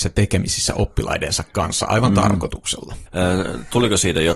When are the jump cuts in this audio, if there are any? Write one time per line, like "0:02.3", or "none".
0:03.1